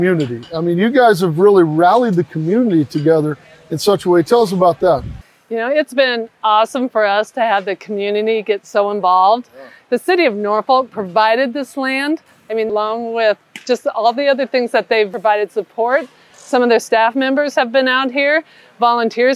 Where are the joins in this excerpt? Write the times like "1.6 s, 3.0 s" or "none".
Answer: 12.7 s